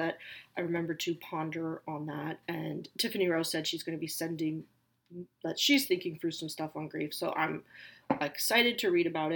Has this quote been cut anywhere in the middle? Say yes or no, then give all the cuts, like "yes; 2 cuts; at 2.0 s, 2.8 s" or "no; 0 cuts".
no; 0 cuts